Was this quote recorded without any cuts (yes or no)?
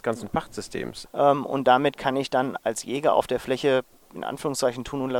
no